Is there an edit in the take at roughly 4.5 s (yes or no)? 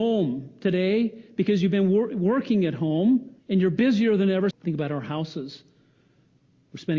yes